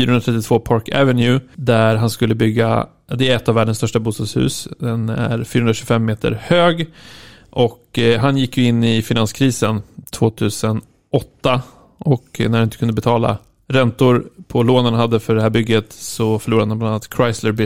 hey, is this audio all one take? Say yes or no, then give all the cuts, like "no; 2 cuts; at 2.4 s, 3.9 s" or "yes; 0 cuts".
yes; 0 cuts